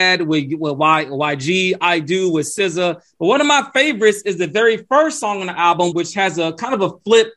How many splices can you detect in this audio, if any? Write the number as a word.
one